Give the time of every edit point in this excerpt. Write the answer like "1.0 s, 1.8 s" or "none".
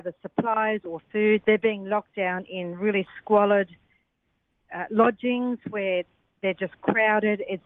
1.4 s

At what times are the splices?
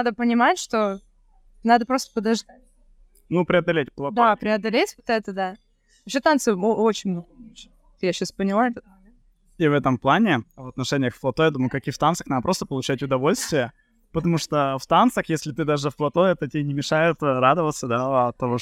none

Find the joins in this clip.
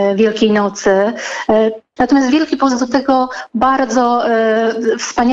2.0 s

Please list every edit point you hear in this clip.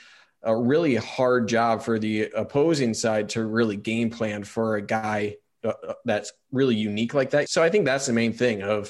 7.5 s

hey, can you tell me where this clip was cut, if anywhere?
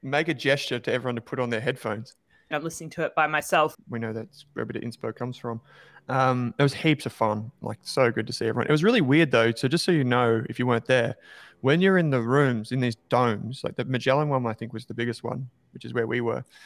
2.5 s, 3.7 s

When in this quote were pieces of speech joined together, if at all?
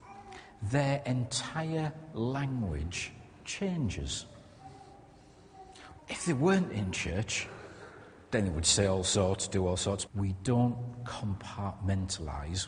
6.0 s, 10.1 s

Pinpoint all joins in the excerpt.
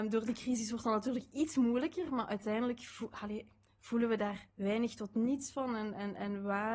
4.5 s

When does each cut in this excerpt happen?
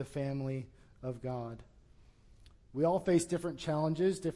2.5 s

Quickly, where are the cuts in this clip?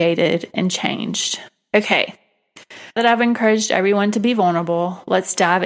3.0 s

